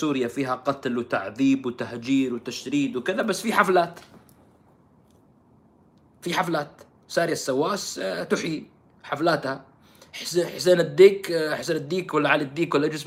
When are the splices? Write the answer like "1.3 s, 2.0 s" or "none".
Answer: none

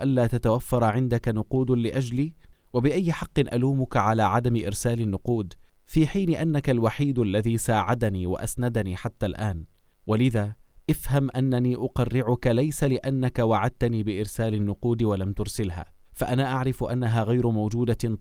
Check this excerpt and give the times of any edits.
16.0 s

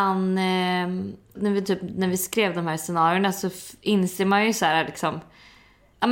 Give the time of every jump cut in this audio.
1.4 s

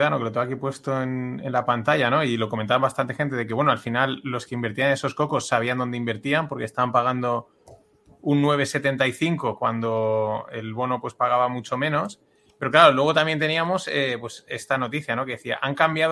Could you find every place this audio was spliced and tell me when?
1.4 s

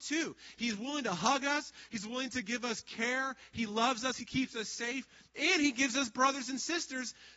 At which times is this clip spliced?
4.2 s

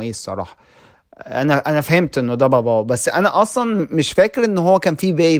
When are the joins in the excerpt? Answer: none

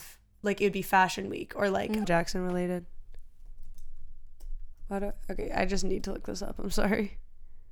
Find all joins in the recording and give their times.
2.0 s

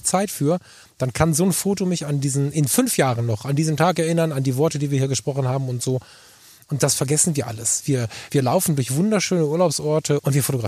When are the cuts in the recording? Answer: none

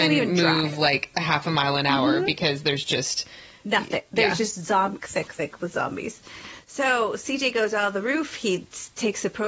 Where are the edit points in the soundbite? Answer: 5.0 s

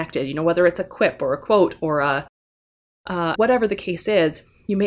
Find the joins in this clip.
3.4 s

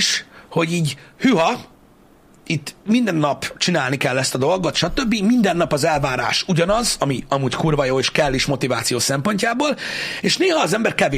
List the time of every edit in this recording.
none

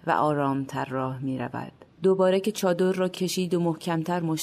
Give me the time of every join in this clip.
1.9 s

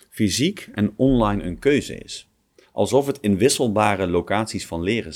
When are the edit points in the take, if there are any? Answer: none

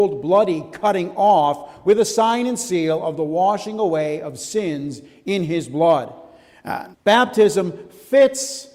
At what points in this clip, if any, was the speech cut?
6.9 s

